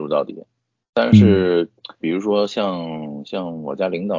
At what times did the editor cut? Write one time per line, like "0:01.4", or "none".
0:02.0